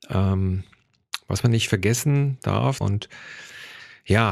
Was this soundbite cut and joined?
yes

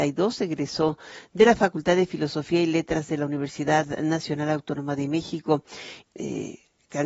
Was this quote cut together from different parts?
yes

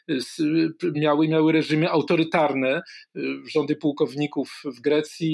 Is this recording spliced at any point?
no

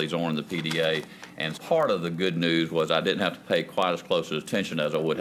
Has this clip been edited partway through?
yes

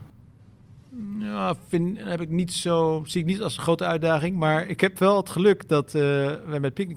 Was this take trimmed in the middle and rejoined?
no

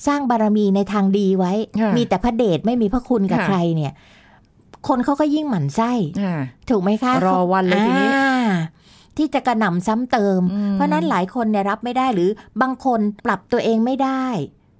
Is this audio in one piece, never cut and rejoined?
no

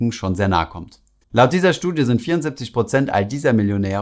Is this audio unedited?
no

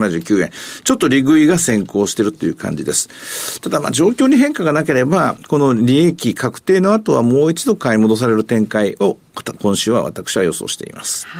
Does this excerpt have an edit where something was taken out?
no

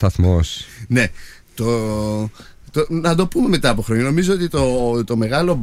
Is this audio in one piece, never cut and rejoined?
yes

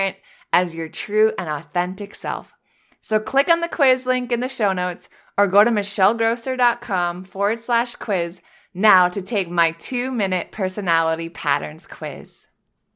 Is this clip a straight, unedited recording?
yes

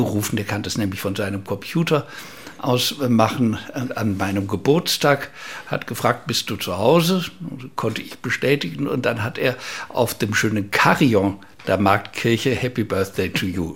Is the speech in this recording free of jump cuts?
yes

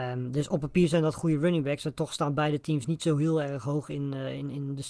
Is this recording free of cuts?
yes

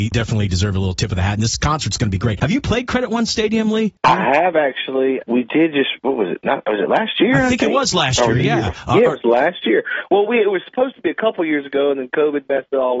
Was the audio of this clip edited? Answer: no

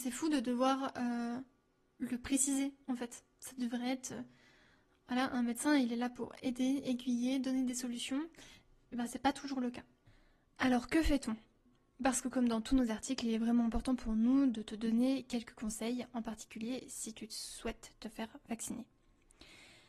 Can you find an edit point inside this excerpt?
no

